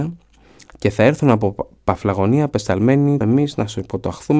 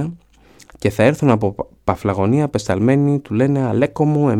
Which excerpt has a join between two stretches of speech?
first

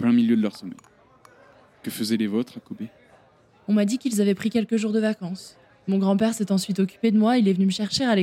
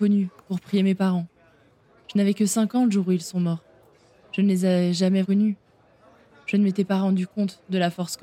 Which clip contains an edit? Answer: second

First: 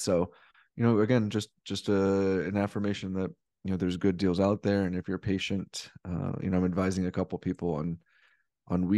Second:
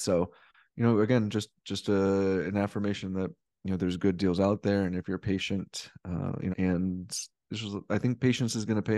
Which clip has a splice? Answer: second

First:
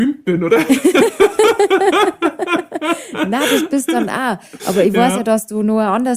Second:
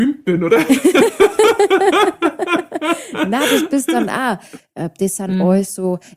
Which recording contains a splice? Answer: second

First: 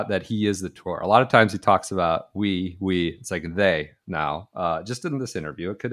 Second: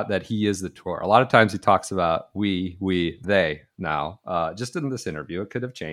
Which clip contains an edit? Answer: second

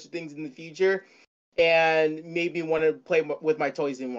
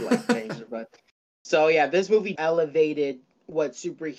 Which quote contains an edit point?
second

